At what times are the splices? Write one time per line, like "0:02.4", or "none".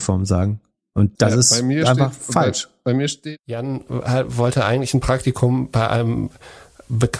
0:01.2